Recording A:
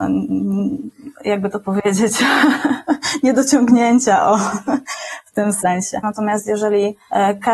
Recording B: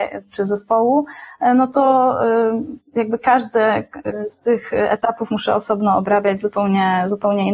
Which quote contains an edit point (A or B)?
A